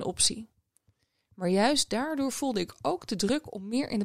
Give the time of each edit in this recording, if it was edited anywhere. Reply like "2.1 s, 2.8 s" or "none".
none